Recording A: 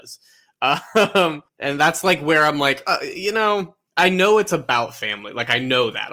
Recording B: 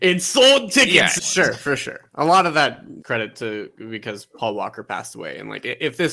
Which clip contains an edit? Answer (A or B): B